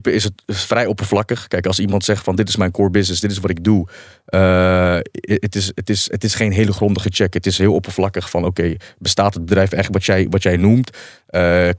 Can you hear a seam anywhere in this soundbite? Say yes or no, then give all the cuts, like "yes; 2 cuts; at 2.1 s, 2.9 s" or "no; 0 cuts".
no; 0 cuts